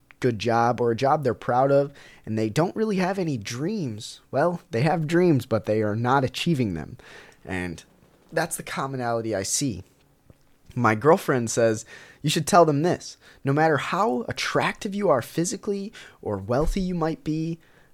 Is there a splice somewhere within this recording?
no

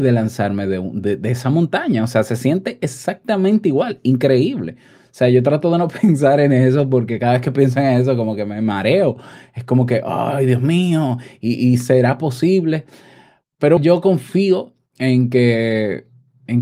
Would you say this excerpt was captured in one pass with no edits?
no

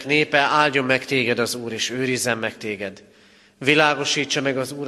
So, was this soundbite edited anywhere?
no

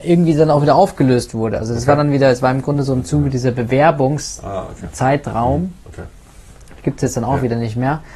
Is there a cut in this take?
no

